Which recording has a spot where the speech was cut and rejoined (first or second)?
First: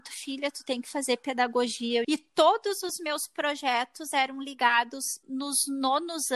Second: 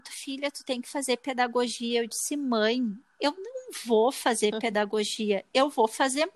first